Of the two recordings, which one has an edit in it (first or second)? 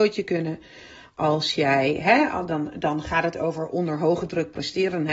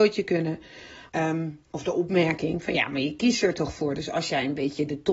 second